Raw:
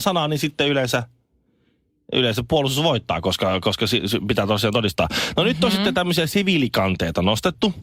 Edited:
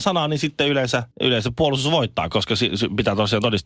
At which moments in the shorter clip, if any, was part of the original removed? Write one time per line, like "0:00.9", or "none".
0:01.1
0:02.3